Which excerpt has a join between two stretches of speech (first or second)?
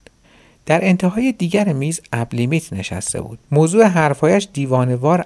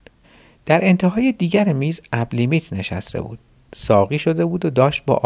first